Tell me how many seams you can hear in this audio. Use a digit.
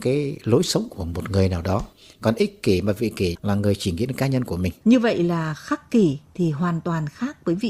1